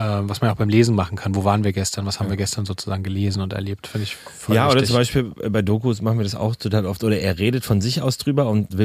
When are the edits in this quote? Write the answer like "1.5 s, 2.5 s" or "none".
none